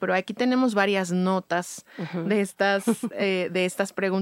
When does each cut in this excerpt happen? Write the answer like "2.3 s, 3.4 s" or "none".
none